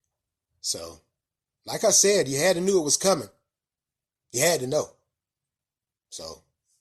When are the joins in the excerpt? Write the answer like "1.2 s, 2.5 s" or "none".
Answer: 1.6 s